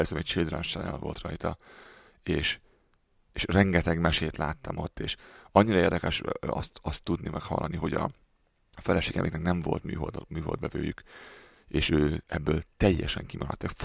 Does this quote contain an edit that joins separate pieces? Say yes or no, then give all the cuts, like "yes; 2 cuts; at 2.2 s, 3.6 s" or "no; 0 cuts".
no; 0 cuts